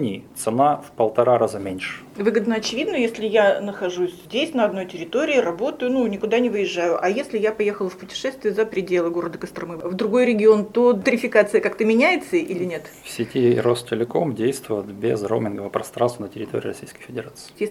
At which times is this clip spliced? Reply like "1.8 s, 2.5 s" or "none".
2.1 s